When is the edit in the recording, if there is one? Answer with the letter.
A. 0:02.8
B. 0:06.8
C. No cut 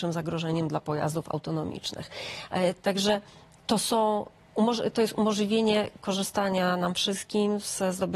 A